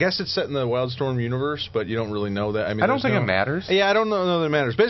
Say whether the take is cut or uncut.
uncut